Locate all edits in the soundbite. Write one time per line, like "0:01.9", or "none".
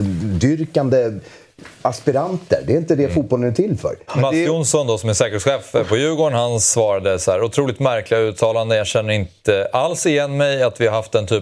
0:04.1